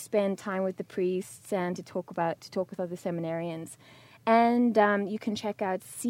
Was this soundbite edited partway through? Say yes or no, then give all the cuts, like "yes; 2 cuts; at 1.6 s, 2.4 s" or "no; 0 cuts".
yes; 1 cut; at 2.4 s